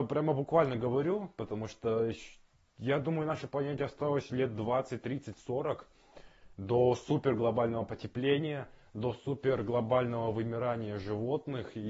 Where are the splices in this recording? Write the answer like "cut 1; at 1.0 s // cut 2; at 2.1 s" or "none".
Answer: none